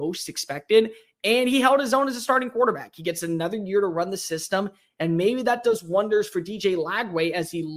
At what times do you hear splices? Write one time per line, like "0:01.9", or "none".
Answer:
none